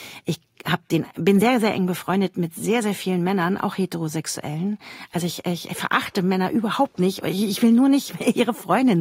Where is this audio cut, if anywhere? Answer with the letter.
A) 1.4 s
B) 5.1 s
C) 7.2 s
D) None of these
D